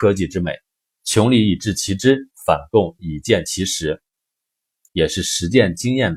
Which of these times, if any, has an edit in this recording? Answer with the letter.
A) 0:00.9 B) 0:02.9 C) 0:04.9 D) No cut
C